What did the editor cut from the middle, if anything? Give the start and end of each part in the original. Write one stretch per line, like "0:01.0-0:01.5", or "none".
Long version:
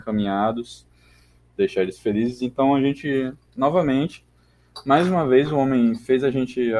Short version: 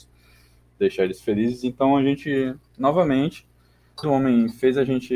0:04.8-0:05.5